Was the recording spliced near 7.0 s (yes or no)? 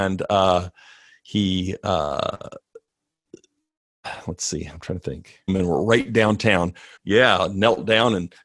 yes